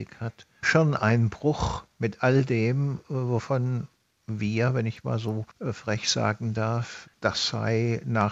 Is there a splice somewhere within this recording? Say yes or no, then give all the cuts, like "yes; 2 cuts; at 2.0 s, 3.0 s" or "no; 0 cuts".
yes; 2 cuts; at 5.5 s, 7.1 s